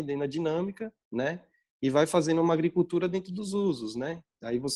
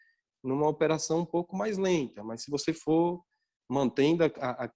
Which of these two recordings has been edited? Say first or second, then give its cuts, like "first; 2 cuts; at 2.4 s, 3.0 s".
first; 1 cut; at 1.0 s